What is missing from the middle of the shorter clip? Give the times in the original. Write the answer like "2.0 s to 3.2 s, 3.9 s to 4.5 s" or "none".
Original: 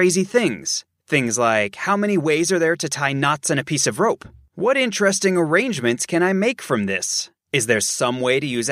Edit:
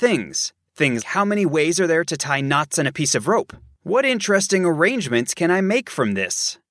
1.3 s to 1.7 s